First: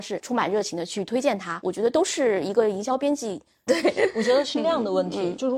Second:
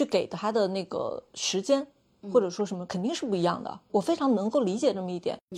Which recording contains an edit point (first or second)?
first